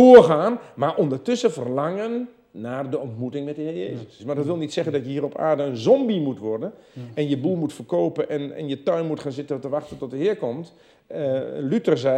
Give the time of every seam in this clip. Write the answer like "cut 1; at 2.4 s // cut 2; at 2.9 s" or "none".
cut 1; at 4.2 s